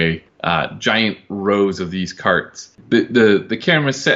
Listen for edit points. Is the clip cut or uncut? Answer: uncut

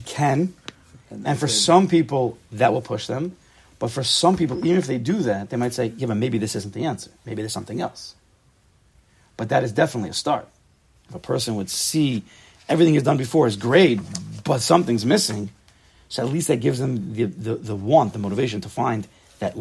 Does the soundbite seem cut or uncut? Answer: cut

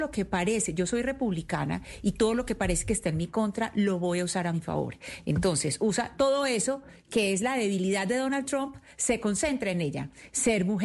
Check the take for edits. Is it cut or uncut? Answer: uncut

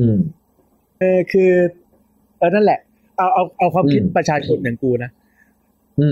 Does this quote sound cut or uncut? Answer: cut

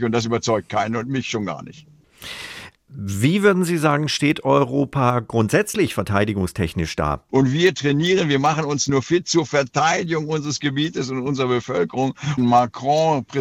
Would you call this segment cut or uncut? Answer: cut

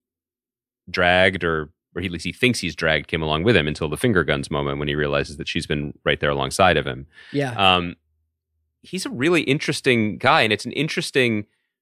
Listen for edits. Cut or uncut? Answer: uncut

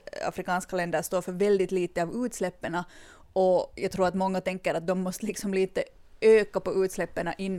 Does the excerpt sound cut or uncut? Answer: uncut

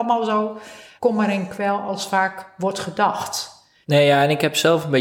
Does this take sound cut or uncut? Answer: cut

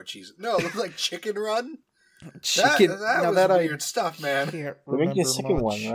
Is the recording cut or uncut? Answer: uncut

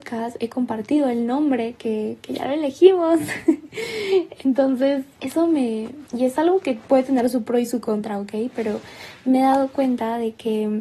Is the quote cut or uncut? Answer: cut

